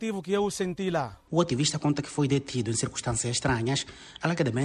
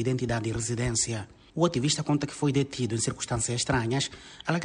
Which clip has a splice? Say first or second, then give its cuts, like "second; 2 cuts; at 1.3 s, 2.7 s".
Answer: first; 1 cut; at 1.3 s